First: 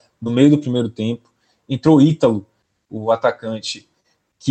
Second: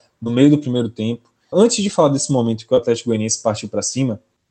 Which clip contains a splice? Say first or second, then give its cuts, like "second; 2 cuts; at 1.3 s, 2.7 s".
second; 1 cut; at 1.5 s